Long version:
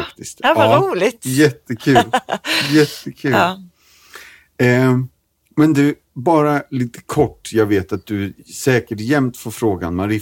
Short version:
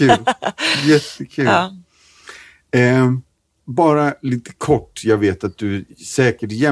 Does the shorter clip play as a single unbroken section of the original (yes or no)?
no